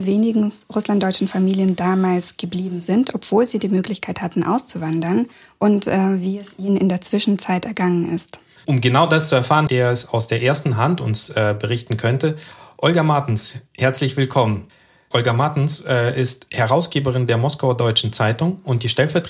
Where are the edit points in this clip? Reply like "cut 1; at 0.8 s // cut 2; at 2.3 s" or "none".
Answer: cut 1; at 9.7 s // cut 2; at 15.1 s